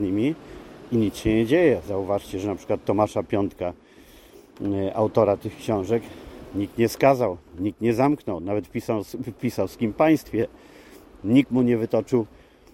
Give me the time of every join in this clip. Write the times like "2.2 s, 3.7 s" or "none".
none